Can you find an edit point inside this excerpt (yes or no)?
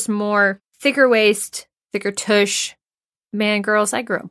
yes